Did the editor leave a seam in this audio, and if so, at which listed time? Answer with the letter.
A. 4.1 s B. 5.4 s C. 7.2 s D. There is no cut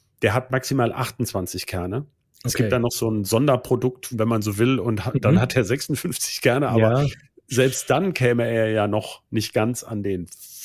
A